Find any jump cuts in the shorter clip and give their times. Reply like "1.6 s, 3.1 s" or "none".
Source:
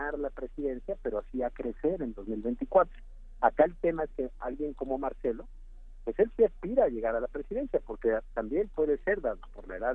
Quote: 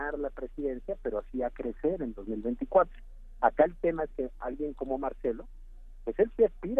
none